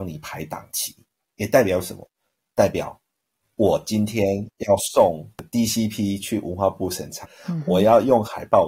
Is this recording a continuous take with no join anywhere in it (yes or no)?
no